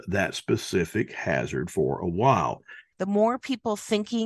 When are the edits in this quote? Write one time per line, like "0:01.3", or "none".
0:02.9